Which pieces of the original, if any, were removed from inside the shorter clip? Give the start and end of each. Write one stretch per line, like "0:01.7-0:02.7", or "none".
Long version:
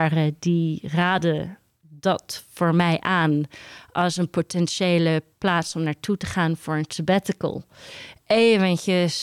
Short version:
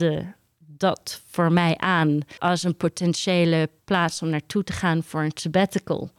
0:03.6-0:03.9